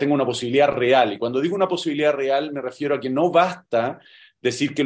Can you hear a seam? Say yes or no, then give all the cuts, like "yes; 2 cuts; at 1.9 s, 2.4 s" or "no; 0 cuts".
no; 0 cuts